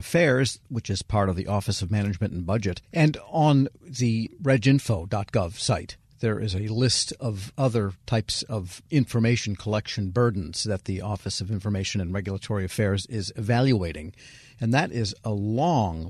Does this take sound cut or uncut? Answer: uncut